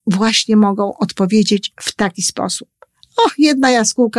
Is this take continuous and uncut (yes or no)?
yes